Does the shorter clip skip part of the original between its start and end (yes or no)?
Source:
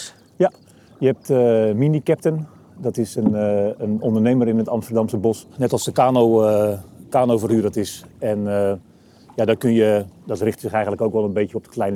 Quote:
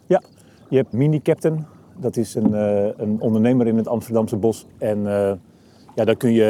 yes